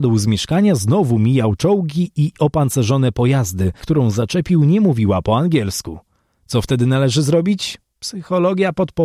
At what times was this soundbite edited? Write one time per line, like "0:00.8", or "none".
0:03.8